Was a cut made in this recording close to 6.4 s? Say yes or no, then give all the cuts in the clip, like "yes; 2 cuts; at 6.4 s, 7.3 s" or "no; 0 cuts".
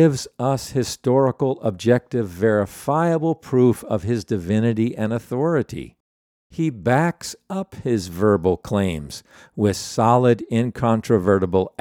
no; 0 cuts